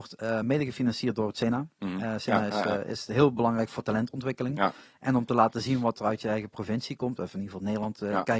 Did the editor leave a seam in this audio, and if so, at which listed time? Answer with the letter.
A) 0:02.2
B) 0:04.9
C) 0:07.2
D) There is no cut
D